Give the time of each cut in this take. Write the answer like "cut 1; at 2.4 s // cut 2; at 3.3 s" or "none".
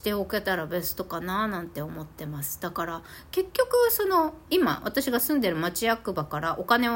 cut 1; at 4.5 s